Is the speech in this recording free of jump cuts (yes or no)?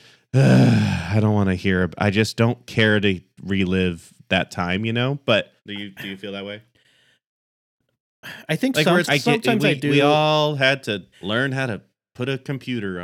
no